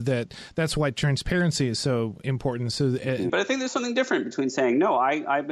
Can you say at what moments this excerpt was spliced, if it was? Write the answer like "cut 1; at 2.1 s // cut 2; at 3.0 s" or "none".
cut 1; at 3.3 s